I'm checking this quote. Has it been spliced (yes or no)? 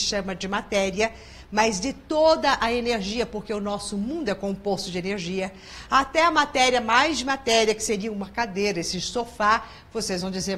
no